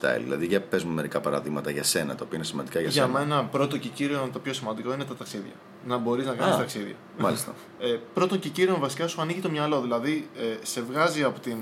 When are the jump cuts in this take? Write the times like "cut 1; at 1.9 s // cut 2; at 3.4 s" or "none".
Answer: cut 1; at 7.8 s